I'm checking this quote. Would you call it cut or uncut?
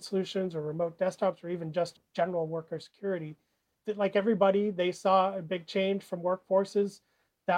uncut